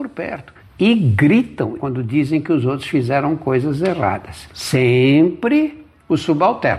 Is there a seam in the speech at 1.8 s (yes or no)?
yes